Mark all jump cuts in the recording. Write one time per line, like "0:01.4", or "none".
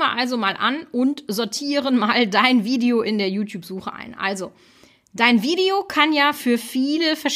none

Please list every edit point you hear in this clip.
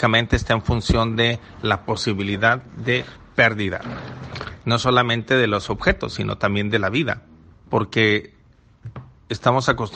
0:07.5

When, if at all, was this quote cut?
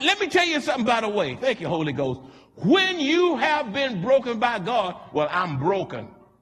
0:05.1

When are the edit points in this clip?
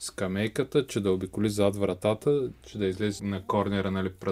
0:03.2

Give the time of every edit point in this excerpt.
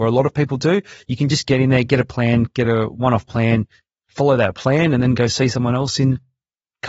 none

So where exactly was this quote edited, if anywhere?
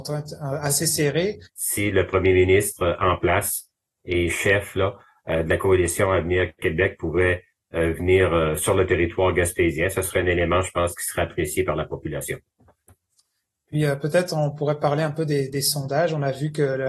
0:01.4

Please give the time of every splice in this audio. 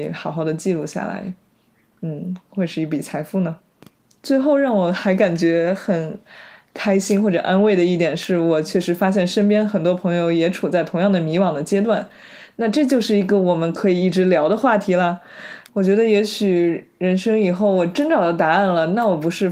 0:15.7

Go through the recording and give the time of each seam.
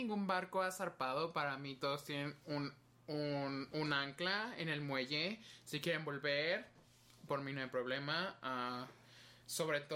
none

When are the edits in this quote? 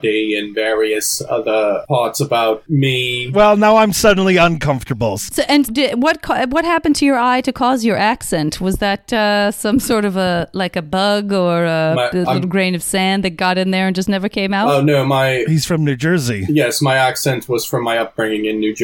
0:05.6

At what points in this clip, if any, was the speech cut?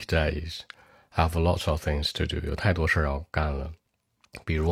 none

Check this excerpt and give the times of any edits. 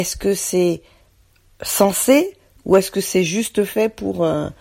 none

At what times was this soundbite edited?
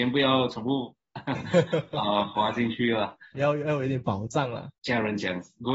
0:03.3
0:04.8

